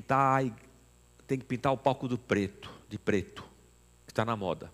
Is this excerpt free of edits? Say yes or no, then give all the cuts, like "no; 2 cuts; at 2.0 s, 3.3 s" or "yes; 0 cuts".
yes; 0 cuts